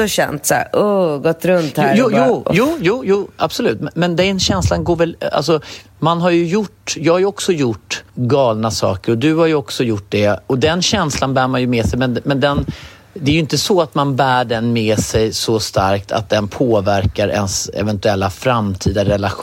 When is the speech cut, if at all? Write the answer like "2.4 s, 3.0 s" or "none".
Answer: 8.1 s